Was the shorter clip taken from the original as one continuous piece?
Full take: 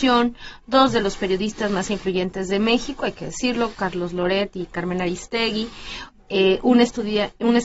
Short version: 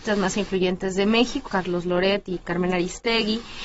no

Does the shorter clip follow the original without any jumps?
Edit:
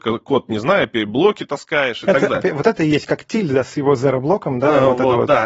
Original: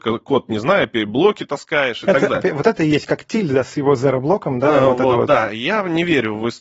yes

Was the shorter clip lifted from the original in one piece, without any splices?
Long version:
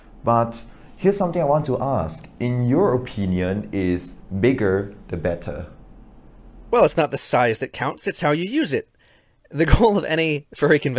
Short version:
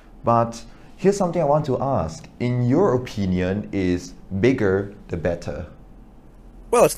yes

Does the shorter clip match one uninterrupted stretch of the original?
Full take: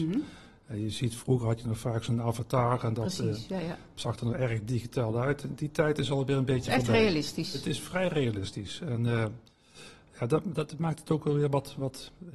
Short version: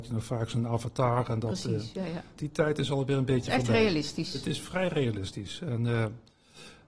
no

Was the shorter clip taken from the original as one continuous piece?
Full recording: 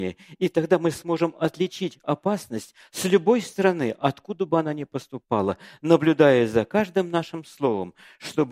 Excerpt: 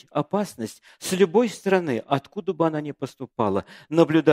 yes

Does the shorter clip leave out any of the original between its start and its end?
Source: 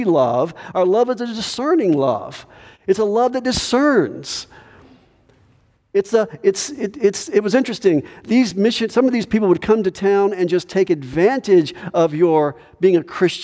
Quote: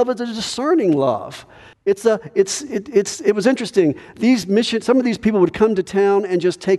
yes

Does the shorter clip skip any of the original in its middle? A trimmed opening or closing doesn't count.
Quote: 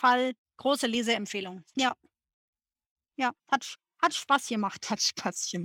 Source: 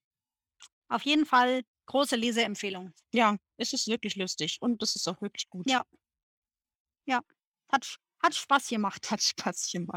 yes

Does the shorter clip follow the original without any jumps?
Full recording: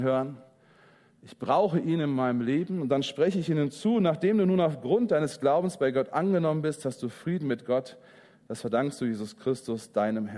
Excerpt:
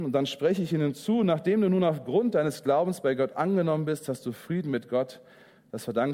yes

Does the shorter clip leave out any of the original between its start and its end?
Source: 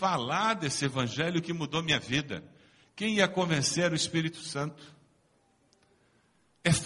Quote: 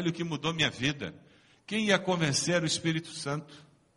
no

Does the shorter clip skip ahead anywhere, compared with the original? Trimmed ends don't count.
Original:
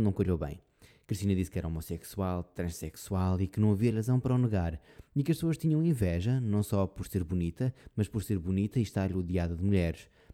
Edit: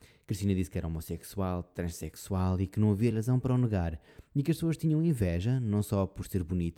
no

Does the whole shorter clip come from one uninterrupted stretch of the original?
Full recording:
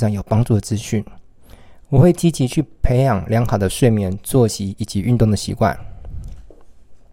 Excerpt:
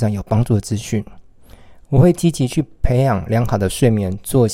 yes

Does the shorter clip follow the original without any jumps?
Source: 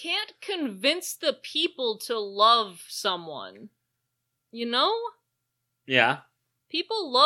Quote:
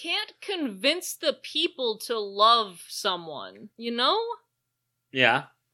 no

